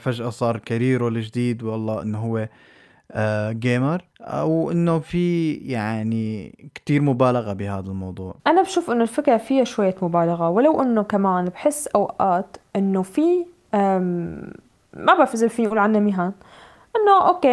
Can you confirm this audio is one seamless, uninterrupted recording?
no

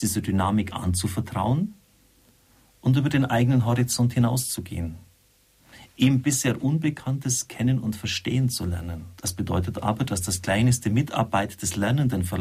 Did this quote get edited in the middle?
yes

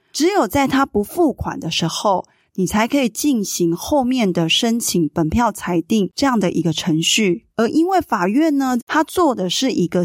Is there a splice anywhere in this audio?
yes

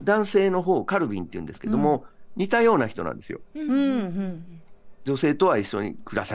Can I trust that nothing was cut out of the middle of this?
yes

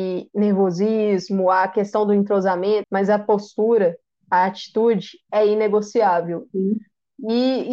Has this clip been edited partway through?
yes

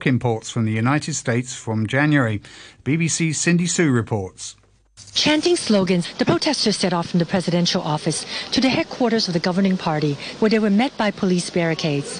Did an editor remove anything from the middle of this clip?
yes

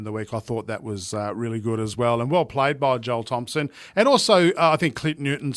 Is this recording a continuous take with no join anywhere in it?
yes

